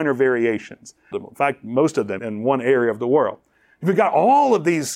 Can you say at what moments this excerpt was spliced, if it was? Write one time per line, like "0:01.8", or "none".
0:01.1
0:02.2